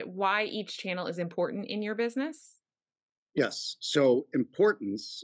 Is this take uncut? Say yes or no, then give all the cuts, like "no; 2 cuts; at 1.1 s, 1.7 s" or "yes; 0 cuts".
yes; 0 cuts